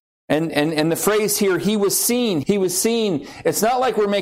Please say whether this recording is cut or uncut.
cut